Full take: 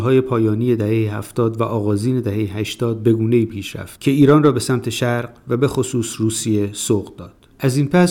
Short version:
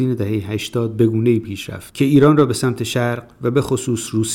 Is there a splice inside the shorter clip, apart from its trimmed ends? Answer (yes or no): no